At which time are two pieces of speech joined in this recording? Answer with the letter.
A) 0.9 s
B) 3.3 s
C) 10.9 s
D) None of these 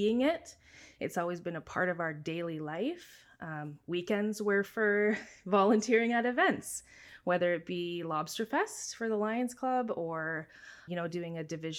C